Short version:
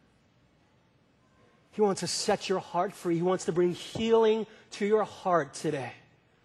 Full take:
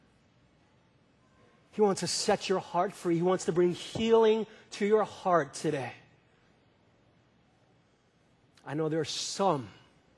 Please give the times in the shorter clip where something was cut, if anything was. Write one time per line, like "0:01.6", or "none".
none